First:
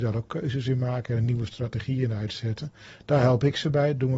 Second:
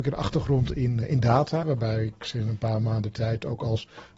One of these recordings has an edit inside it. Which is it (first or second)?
second